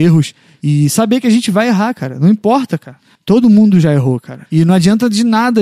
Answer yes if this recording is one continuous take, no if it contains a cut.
no